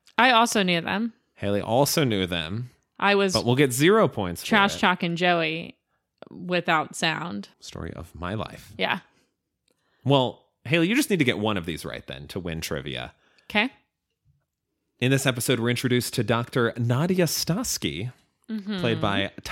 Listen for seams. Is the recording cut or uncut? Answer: cut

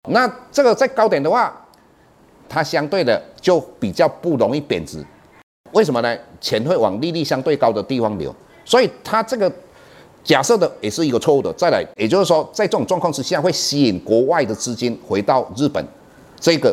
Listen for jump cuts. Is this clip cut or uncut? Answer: cut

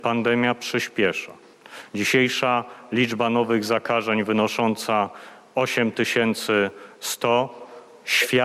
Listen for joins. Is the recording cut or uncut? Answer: uncut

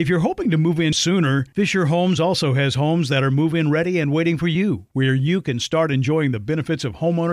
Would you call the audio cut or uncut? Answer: cut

